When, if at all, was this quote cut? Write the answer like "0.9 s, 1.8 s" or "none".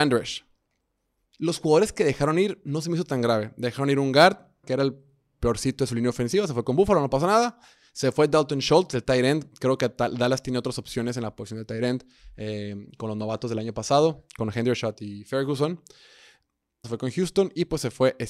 4.6 s, 16.8 s